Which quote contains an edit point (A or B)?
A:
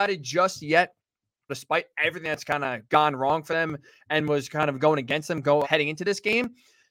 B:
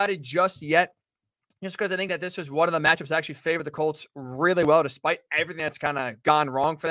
A